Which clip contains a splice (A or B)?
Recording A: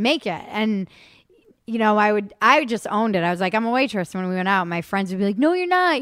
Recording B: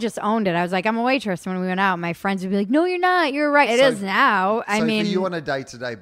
B